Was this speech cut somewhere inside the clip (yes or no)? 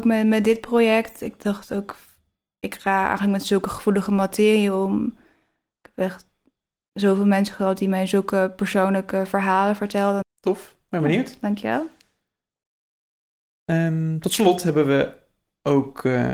yes